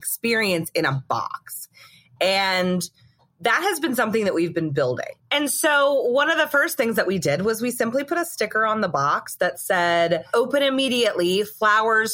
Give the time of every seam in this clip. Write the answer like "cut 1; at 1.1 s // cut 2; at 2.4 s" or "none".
none